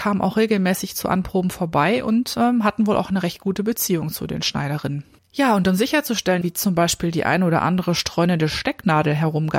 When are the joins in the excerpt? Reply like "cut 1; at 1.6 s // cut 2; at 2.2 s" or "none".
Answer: cut 1; at 5.2 s // cut 2; at 6.4 s